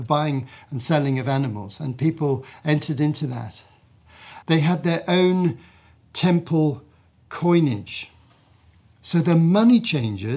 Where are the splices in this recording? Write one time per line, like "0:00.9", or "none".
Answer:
0:04.4